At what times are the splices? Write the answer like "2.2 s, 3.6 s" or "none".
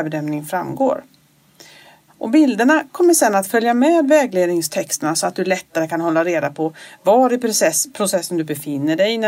2.1 s